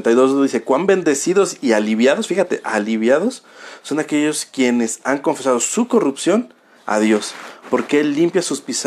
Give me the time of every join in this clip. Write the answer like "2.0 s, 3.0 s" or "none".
none